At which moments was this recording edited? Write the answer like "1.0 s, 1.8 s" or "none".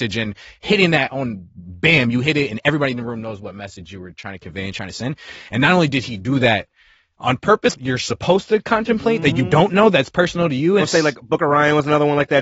7.7 s, 10.8 s